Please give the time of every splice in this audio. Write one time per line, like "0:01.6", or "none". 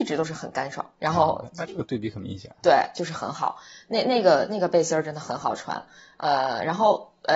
0:00.9

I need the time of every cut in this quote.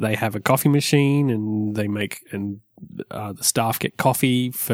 none

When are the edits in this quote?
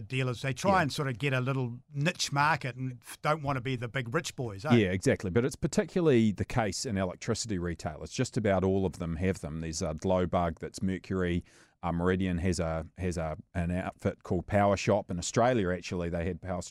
none

